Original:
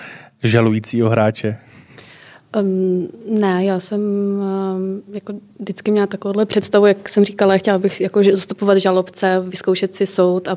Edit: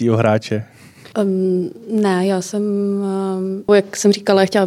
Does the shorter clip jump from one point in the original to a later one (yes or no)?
yes